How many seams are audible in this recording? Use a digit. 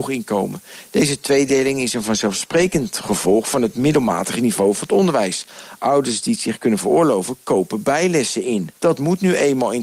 1